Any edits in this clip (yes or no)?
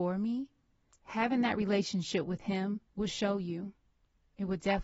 yes